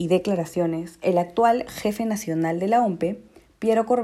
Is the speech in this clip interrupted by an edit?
no; 0 cuts

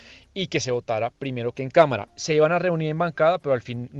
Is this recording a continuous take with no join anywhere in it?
no; 1 cut; at 2.1 s

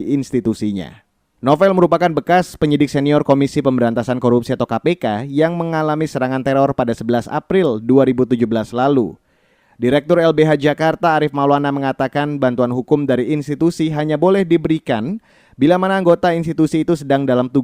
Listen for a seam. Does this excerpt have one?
yes; 1 cut; at 1.4 s

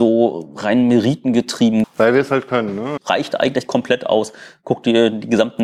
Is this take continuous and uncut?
no; 2 cuts; at 1.8 s, 3.0 s

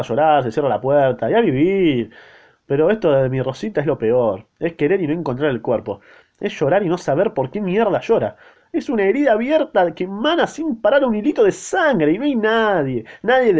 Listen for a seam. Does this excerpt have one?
yes; 1 cut; at 8.6 s

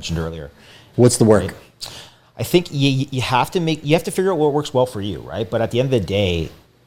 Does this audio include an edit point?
yes; 1 cut; at 0.9 s

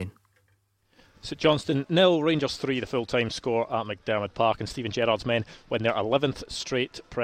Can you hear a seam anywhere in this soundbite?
no; 0 cuts

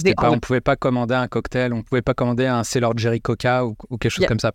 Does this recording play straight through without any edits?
yes; 0 cuts

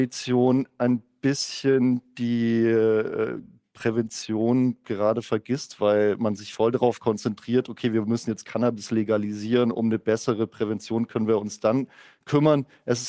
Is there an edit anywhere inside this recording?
no; 0 cuts

